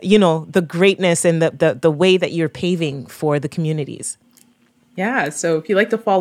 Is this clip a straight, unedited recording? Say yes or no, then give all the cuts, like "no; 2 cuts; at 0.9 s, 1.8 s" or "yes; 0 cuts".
yes; 0 cuts